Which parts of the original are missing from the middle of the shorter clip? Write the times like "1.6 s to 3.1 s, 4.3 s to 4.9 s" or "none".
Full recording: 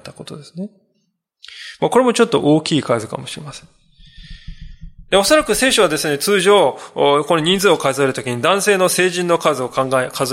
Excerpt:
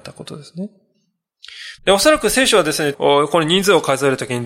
1.8 s to 5.0 s, 6.2 s to 6.9 s